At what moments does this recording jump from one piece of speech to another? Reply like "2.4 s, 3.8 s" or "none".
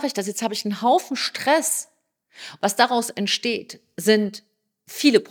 2.6 s